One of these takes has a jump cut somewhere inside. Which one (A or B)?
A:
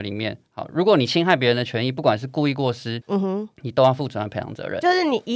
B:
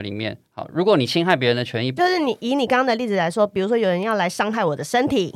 B